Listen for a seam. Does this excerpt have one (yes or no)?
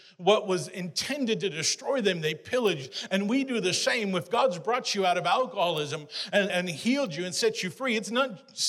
yes